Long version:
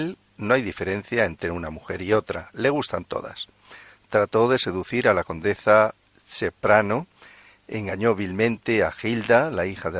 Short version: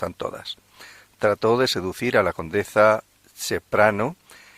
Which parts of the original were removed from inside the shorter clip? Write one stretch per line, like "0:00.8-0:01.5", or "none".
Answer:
none